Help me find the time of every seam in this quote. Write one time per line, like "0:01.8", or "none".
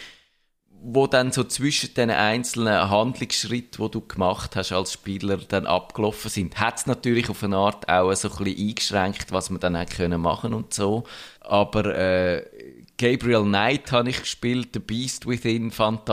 0:11.4